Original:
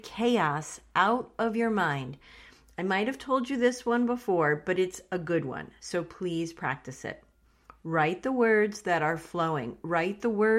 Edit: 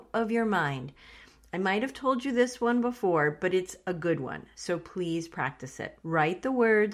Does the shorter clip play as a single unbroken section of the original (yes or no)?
no